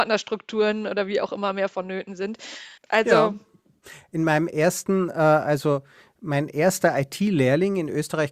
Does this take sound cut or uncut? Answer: cut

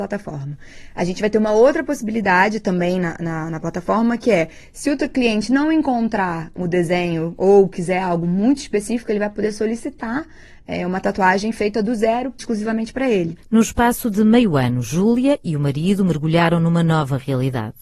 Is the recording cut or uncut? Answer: uncut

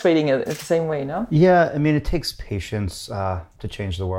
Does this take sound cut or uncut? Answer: uncut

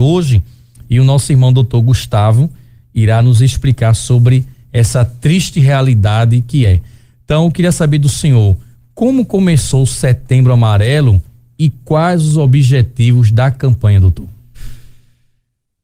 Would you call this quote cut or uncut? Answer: uncut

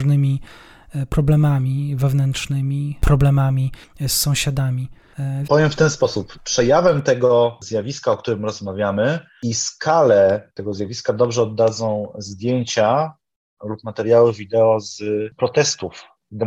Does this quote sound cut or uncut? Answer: cut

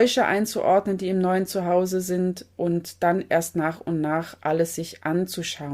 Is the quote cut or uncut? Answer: uncut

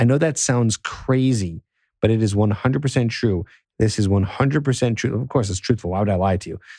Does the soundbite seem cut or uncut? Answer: cut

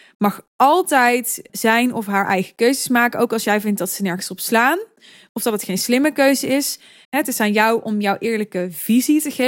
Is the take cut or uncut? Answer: cut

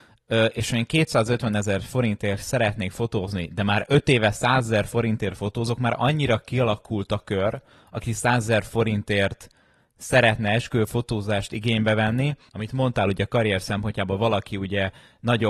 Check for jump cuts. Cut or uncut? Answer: cut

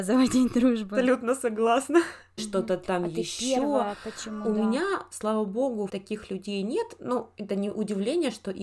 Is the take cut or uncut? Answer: cut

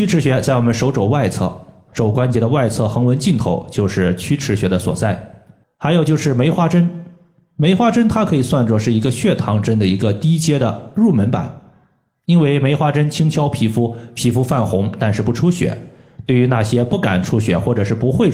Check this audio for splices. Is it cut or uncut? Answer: cut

